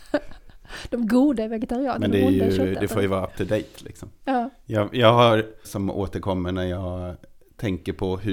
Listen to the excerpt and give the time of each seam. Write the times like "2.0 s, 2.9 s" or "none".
5.6 s